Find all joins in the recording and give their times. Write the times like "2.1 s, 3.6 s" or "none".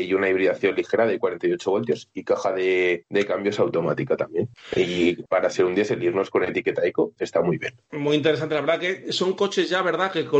none